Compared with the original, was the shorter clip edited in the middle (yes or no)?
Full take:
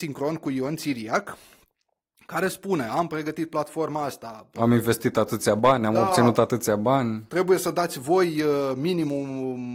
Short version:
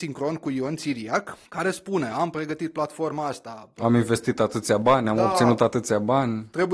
yes